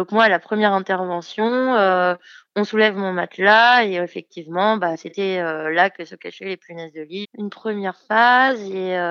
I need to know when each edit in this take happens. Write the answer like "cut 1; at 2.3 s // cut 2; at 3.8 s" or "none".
cut 1; at 7.2 s